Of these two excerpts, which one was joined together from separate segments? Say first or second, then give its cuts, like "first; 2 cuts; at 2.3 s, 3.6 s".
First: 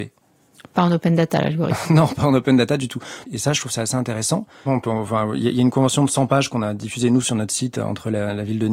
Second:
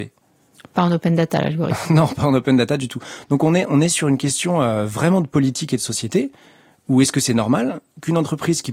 first; 2 cuts; at 3.2 s, 4.7 s